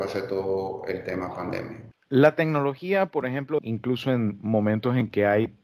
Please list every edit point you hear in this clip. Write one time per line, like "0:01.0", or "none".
0:01.9
0:03.6

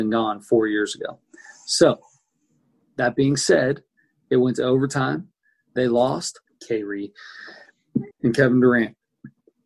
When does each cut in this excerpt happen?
0:06.5
0:08.1

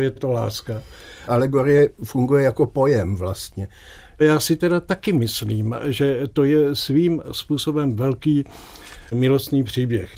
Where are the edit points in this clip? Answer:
0:01.3
0:04.2

